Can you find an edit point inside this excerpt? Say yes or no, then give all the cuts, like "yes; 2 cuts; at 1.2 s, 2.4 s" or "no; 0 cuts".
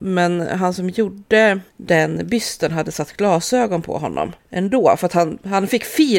yes; 2 cuts; at 1.7 s, 4.4 s